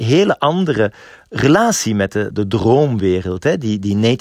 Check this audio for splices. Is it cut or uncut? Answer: cut